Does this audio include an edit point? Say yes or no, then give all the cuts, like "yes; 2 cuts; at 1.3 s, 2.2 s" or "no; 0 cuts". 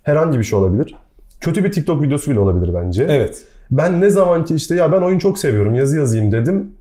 no; 0 cuts